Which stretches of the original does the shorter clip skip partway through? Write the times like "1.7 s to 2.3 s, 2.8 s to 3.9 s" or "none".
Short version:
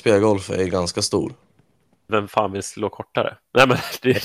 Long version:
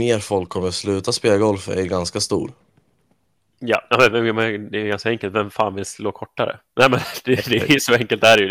3.3 s to 5.3 s